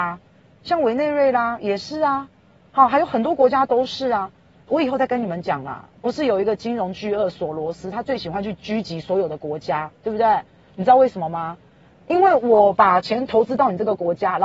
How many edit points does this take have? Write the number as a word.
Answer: one